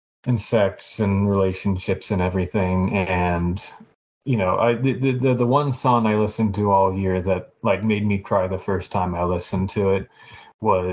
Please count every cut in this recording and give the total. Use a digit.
0